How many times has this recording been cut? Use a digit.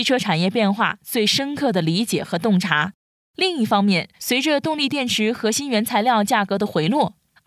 1